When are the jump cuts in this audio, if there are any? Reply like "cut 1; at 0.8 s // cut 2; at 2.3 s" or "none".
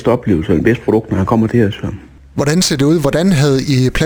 none